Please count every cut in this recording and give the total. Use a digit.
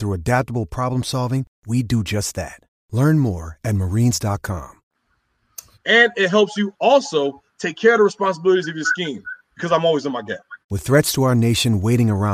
2